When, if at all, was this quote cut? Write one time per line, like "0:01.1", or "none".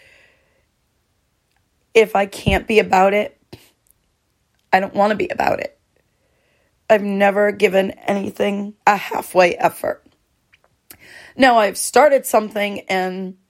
0:08.8